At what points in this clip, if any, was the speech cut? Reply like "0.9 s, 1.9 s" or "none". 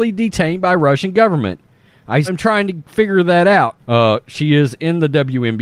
2.2 s, 3.8 s